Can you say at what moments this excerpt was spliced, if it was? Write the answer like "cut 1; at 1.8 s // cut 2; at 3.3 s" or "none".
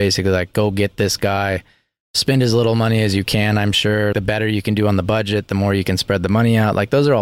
cut 1; at 4.1 s

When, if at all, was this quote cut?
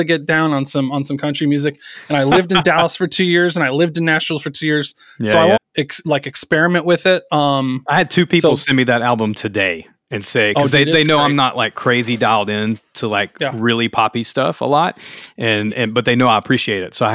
cut 1; at 5.6 s

